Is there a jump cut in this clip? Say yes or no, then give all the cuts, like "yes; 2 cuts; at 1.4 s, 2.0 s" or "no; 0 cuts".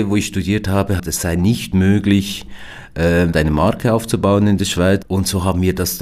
yes; 3 cuts; at 1.0 s, 3.3 s, 5.0 s